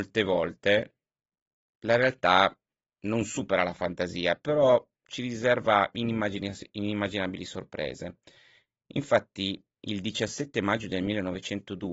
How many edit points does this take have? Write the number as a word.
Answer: zero